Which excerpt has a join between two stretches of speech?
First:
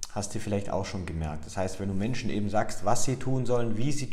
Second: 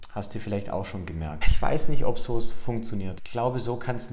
second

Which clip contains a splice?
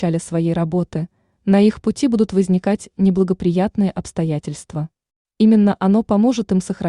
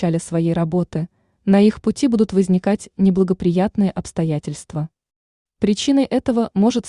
first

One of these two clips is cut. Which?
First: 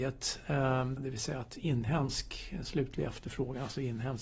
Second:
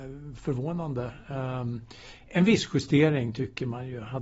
first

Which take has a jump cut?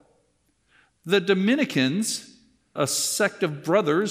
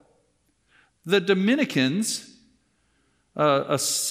first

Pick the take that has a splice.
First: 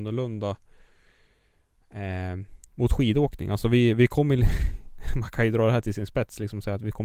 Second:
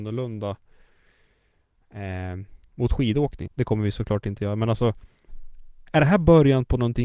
second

